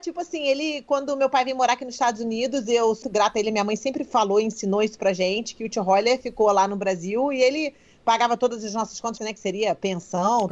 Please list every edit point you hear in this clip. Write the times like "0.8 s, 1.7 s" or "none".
3.0 s, 9.2 s